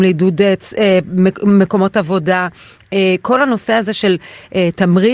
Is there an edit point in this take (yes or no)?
no